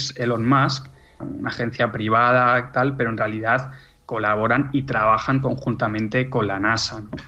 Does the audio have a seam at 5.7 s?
no; 1 cut; at 1.2 s

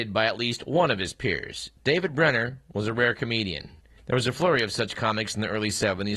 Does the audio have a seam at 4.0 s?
yes; 1 cut; at 4.0 s

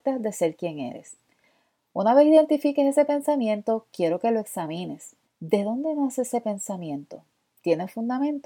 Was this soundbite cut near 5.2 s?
yes; 1 cut; at 5.2 s

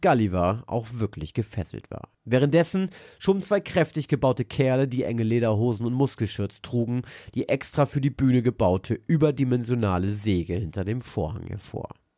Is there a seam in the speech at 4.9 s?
no; 1 cut; at 2.1 s

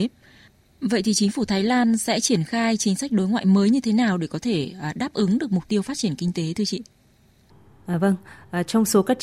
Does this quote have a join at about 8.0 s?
no; 0 cuts

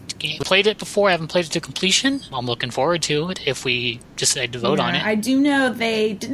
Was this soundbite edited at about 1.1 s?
no; 1 cut; at 2.3 s

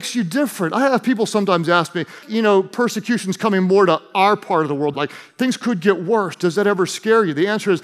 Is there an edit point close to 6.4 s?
no; 2 cuts; at 2.2 s, 4.9 s

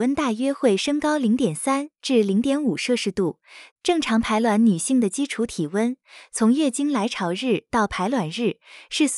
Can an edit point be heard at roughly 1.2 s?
no; 1 cut; at 3.7 s

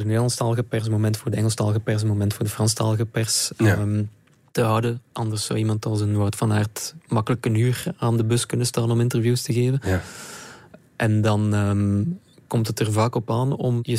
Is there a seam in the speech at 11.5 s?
no; 0 cuts

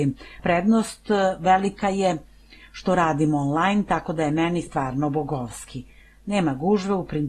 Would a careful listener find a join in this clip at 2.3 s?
no; 0 cuts

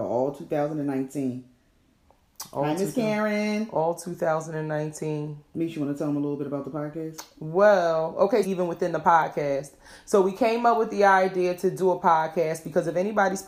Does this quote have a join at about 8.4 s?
yes; 1 cut; at 8.4 s

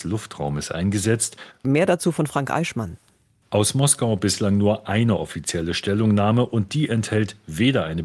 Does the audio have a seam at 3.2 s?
no; 1 cut; at 1.6 s

